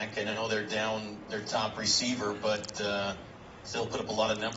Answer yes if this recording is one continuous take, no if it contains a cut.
yes